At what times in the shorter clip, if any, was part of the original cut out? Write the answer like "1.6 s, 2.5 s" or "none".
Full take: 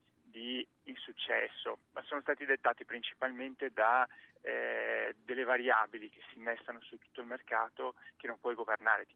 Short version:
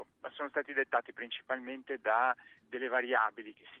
2.6 s